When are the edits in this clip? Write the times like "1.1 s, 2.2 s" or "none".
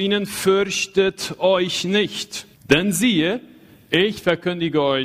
2.5 s